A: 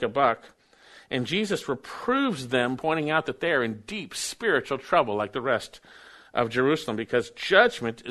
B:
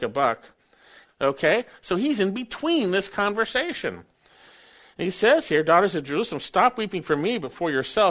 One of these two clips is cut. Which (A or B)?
B